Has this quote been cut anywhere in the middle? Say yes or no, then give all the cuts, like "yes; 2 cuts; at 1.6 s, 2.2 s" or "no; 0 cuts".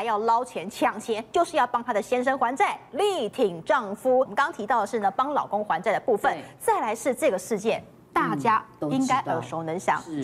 no; 0 cuts